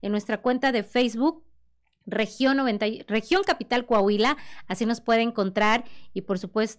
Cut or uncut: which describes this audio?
uncut